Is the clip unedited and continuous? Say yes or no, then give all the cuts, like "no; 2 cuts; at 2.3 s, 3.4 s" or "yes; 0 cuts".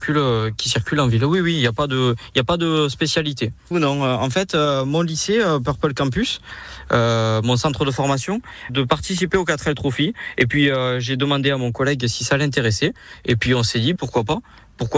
no; 3 cuts; at 3.7 s, 8.7 s, 14.0 s